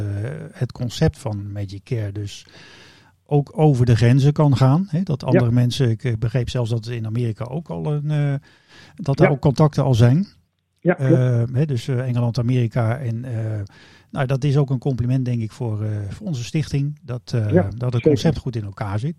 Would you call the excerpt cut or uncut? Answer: uncut